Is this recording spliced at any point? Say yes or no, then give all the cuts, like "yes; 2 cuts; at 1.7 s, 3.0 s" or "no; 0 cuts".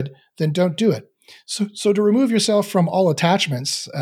no; 0 cuts